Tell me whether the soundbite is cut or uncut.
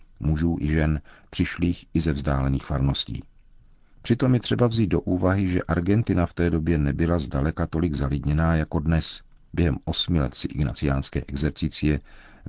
cut